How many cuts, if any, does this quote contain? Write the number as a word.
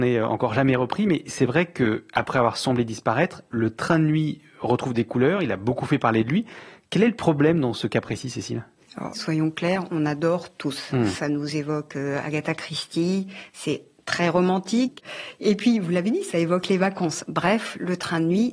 one